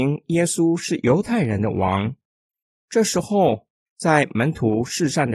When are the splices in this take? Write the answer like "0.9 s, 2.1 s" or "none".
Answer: none